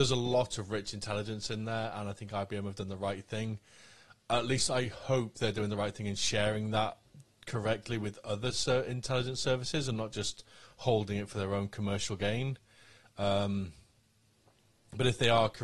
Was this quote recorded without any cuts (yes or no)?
yes